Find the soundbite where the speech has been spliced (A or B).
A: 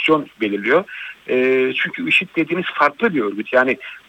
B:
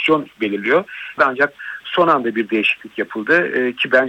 B